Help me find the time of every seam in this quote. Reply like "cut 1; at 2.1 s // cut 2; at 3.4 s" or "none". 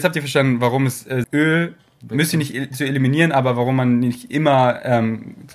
cut 1; at 1.2 s